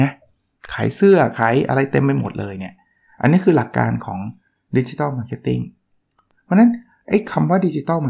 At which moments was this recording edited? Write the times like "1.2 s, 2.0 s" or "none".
none